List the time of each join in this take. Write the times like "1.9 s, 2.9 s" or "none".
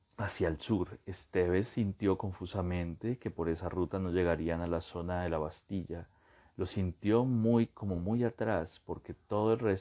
none